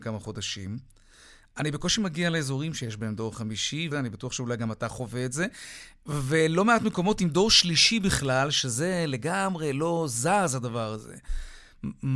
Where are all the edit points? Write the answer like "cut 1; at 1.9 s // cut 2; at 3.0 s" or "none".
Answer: cut 1; at 3.9 s